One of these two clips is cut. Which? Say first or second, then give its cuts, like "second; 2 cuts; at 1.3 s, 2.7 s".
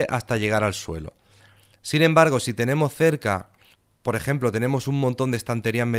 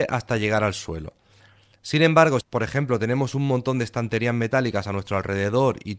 second; 1 cut; at 2.4 s